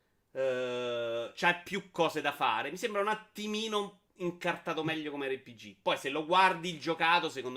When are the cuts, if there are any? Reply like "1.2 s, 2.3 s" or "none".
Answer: 4.1 s